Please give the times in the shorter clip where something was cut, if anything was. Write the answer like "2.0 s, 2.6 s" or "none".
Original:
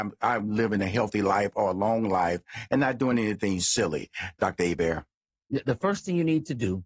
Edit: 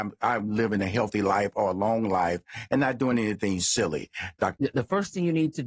4.6 s